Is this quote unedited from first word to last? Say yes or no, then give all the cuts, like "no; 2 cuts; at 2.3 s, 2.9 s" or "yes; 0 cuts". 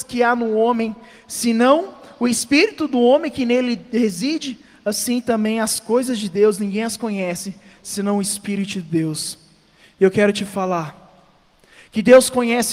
yes; 0 cuts